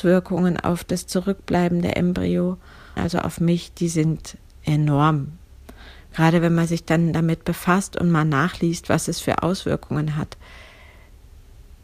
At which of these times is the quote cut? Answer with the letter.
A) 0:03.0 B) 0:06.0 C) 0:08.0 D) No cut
A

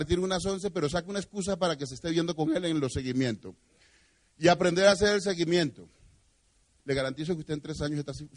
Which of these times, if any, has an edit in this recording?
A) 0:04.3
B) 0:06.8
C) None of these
B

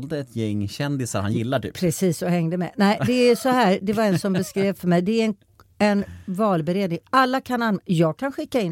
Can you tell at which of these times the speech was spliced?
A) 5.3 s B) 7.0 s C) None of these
C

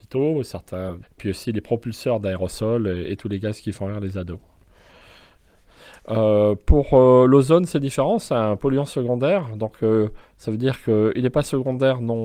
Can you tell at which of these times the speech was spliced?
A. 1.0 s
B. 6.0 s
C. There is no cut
A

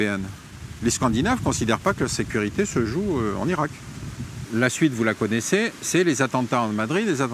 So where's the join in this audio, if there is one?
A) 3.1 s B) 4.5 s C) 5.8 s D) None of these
B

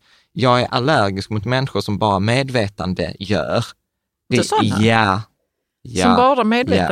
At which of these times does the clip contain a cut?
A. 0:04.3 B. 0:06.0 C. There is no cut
A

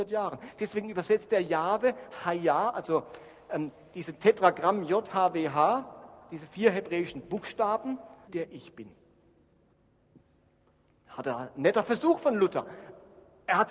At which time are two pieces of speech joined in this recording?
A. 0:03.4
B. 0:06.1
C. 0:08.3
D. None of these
C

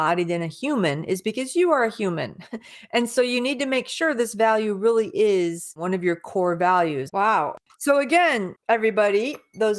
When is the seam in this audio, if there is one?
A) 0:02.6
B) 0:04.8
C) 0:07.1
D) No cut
C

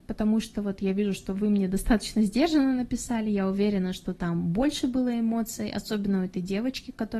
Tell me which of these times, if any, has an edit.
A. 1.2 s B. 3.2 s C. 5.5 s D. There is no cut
D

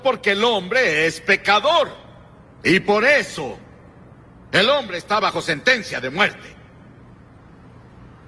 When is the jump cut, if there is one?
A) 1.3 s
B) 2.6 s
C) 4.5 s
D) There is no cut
B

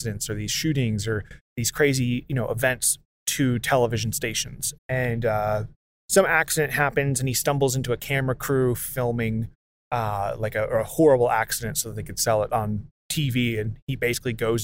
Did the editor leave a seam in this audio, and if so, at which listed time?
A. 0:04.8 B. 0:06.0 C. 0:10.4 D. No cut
A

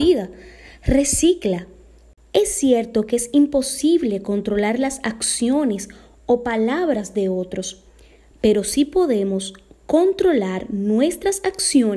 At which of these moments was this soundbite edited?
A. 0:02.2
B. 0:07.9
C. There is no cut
A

